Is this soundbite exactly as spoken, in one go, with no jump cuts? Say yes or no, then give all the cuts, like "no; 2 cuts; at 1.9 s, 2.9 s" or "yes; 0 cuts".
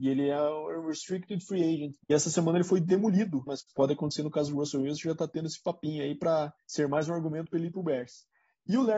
no; 3 cuts; at 2.0 s, 3.5 s, 6.6 s